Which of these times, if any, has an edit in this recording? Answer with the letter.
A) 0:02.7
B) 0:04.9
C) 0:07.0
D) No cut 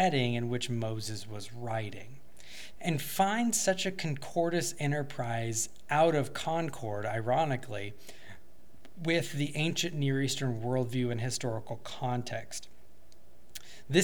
A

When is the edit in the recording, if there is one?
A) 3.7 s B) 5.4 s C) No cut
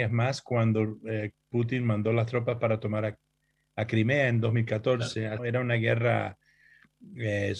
B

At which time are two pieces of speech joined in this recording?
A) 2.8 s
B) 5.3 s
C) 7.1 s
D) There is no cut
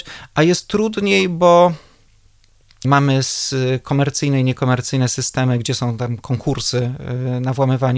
A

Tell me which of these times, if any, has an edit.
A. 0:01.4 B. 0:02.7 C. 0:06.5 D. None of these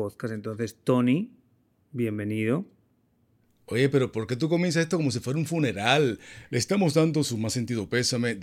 D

